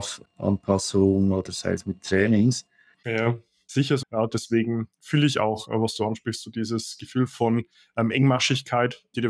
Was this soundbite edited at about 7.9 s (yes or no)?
no